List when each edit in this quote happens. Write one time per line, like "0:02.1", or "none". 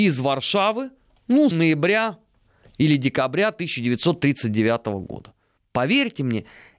0:01.5
0:05.6